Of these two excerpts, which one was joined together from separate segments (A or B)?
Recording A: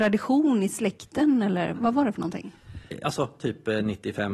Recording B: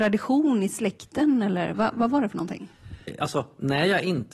A